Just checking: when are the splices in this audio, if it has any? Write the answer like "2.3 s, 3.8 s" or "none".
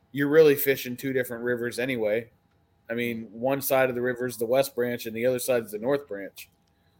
none

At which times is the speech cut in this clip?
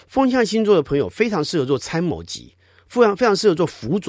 none

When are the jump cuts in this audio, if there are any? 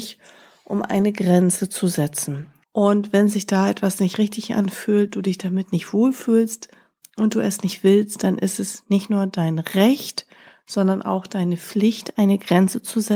2.6 s

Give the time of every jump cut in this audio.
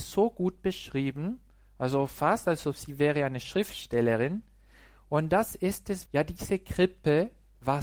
6.1 s

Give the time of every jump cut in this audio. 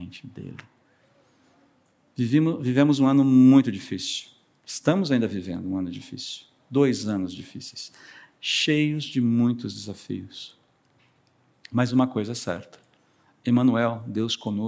none

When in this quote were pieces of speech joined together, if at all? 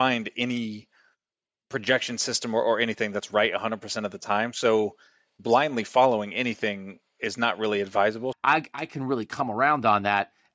8.3 s

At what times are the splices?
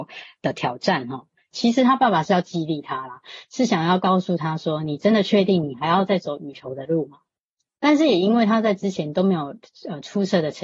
1.5 s

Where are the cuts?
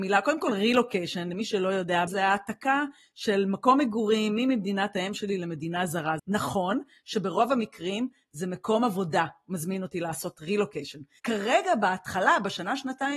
2.1 s, 6.2 s, 11.2 s

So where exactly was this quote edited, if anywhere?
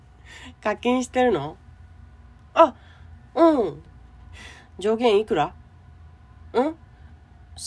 3.9 s

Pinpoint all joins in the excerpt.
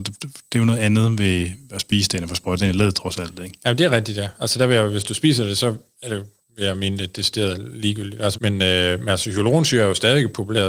8.3 s

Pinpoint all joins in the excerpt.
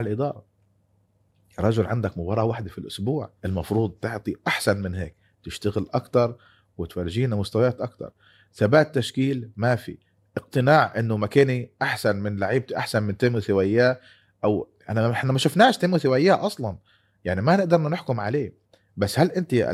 3.4 s

